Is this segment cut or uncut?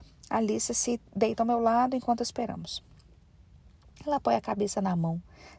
uncut